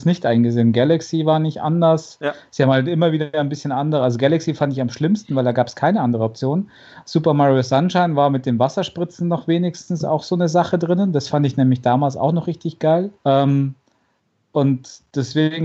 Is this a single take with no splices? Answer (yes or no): no